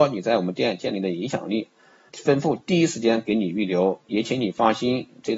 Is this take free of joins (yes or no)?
no